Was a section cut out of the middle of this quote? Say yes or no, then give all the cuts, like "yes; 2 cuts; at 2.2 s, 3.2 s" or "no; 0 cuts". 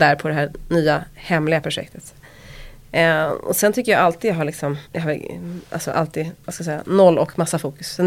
yes; 1 cut; at 4.8 s